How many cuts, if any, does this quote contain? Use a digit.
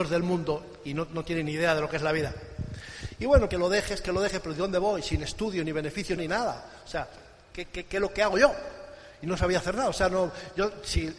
2